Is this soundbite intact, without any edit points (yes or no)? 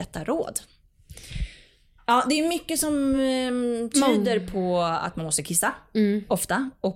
yes